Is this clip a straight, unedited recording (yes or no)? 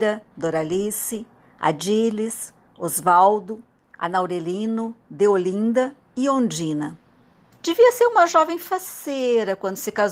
no